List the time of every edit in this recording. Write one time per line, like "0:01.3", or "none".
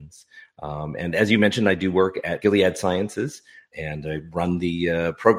none